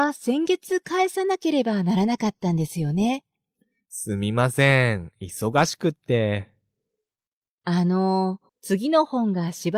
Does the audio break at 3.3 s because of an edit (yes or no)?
no